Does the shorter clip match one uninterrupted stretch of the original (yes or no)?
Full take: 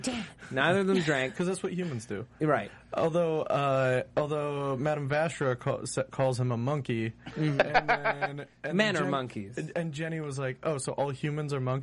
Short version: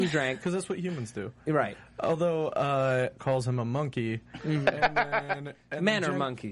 no